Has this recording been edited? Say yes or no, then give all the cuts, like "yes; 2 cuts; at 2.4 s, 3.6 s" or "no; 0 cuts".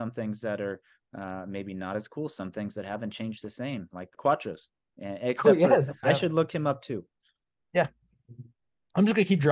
yes; 2 cuts; at 4.2 s, 6.0 s